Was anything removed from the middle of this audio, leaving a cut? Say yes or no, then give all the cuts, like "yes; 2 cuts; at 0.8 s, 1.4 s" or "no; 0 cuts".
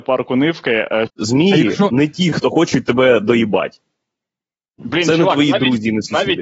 yes; 1 cut; at 1.1 s